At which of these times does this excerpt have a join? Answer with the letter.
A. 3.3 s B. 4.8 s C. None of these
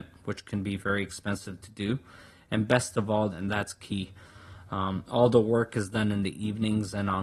A